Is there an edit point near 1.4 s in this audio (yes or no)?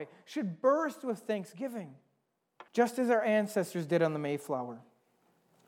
no